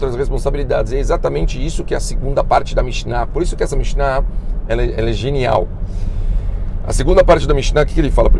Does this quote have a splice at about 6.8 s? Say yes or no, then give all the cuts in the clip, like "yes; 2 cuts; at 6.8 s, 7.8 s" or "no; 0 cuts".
no; 0 cuts